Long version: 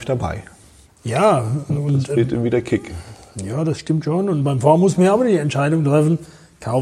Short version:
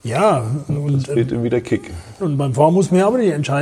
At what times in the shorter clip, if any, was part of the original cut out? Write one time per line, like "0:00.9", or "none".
0:02.2